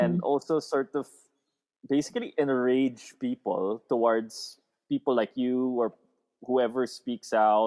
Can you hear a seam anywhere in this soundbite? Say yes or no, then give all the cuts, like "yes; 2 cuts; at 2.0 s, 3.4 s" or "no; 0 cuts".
no; 0 cuts